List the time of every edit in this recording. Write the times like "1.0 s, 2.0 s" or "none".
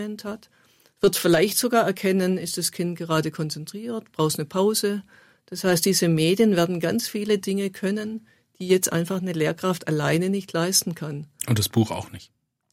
none